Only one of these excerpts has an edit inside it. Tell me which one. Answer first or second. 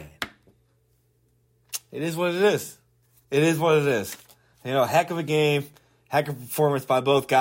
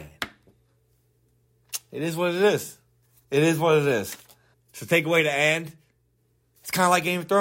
second